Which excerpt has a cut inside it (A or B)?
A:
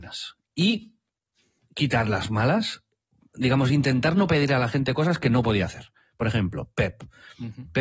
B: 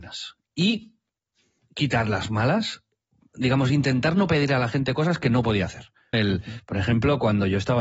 B